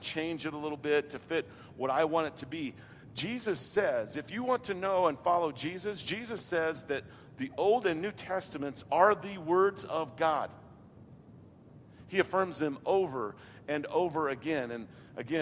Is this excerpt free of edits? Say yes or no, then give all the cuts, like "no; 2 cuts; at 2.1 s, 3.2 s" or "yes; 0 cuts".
yes; 0 cuts